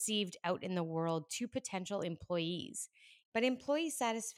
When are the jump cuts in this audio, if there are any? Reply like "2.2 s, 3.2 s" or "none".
3.2 s